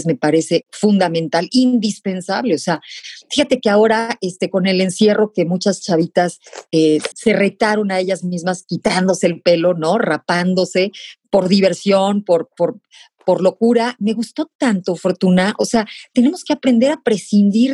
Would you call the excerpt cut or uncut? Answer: cut